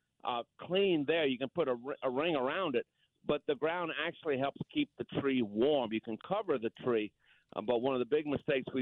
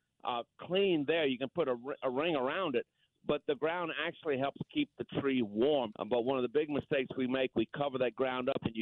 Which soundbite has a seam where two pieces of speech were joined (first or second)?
second